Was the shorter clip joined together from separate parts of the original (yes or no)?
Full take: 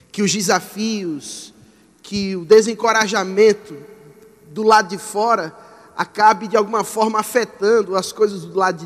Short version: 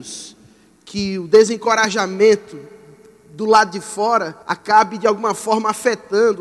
yes